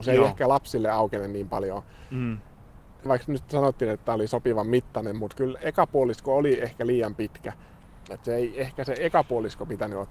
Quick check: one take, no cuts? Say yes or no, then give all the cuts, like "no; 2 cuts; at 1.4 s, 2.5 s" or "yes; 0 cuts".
no; 1 cut; at 8.1 s